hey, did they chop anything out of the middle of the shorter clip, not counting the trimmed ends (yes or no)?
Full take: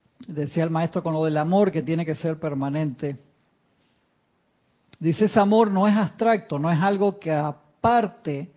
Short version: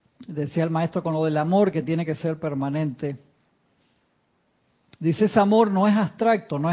no